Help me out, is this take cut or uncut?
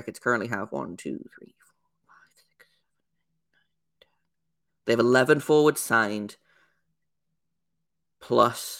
uncut